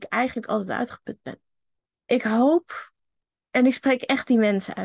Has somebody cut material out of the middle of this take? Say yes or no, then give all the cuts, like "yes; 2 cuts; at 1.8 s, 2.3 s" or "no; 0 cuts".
yes; 1 cut; at 1.9 s